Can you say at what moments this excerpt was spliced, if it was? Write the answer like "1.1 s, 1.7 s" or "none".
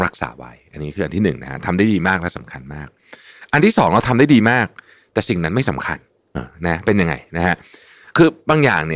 6.3 s